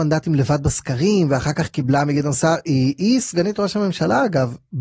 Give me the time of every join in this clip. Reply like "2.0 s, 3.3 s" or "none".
none